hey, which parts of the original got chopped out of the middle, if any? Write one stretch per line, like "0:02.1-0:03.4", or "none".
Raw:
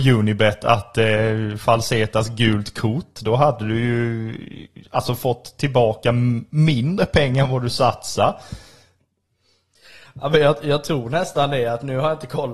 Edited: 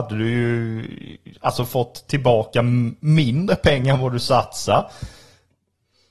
none